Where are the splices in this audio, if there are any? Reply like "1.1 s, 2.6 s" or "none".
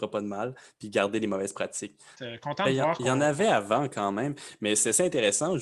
2.1 s